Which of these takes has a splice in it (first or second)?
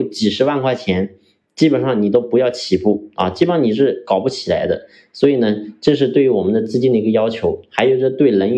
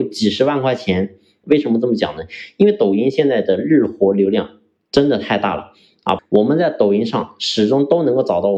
second